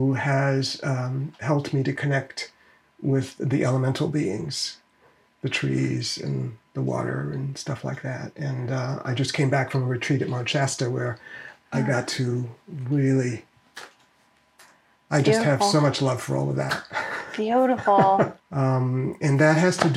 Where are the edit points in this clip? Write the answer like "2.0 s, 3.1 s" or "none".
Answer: 18.4 s